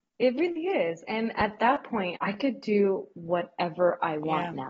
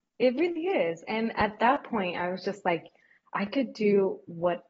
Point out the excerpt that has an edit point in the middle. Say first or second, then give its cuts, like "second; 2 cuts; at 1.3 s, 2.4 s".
first; 1 cut; at 2.1 s